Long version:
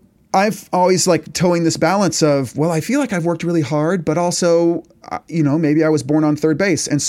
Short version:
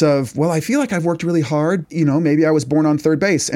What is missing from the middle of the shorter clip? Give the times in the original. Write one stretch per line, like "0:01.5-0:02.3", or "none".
0:04.0-0:05.2

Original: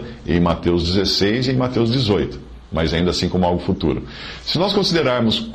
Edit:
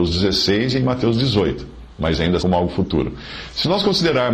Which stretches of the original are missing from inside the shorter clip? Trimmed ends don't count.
0:03.1-0:03.3

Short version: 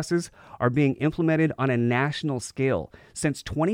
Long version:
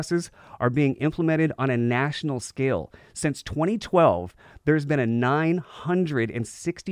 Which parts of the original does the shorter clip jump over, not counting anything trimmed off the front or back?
none

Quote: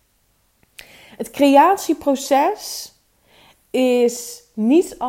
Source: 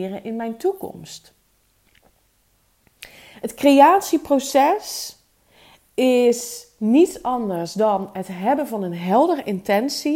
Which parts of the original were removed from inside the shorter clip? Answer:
none

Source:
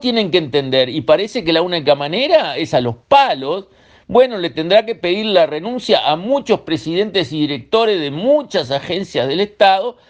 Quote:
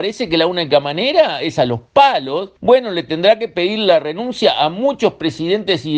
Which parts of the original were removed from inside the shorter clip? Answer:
0:03.7-0:04.0

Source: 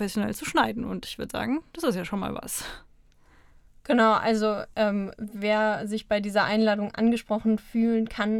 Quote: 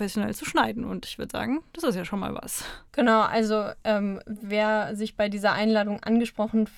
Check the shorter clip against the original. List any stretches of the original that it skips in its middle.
0:02.9-0:03.8

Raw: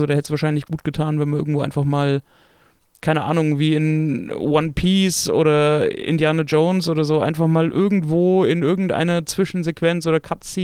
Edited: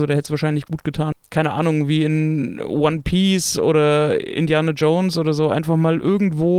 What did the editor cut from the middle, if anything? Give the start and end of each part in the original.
0:01.1-0:02.8

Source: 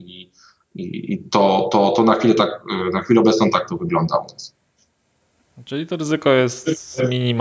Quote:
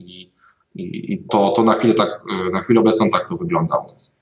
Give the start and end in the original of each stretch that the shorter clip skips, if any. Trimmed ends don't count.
0:01.3-0:01.7

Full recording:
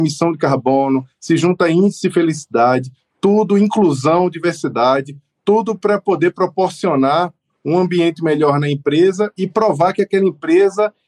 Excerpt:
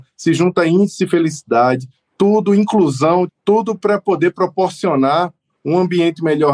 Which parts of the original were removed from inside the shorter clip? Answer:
0:04.3-0:05.3

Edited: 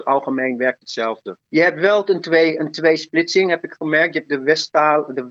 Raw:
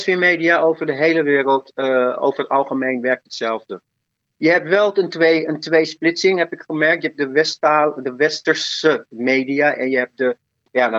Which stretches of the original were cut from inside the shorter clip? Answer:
0:03.9-0:04.3

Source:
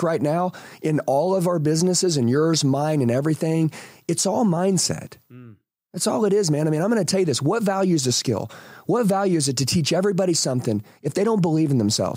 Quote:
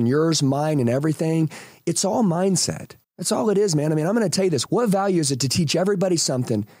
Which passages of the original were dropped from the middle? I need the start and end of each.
0:05.2-0:05.8
0:07.4-0:08.8

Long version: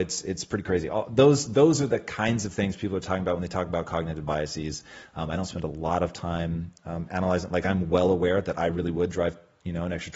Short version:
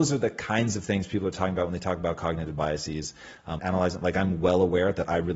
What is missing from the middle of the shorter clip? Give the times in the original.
0:05.3-0:07.1

